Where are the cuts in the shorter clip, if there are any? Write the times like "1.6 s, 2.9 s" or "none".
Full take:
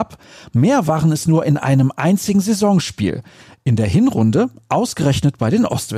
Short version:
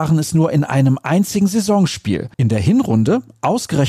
2.3 s